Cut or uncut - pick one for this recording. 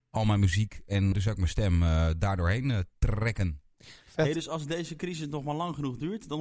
cut